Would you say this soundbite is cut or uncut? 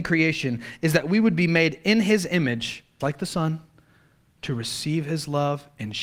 cut